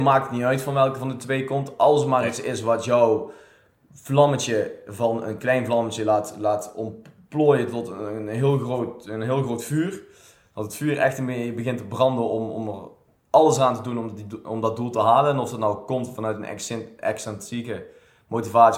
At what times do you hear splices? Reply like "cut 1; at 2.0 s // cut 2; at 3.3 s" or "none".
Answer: none